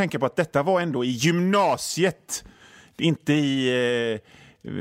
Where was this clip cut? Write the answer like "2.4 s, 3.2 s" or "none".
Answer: none